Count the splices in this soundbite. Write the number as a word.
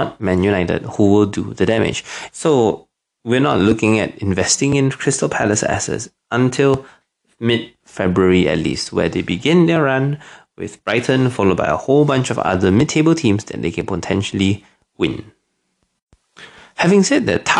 one